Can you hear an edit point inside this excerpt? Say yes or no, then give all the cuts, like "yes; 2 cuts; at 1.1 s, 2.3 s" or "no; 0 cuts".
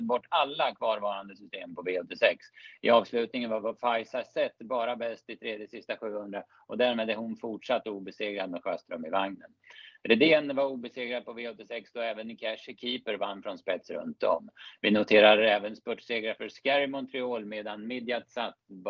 no; 0 cuts